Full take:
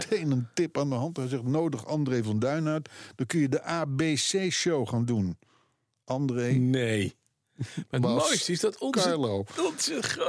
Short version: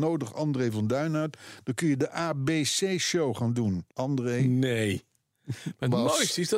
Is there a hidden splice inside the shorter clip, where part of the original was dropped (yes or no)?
yes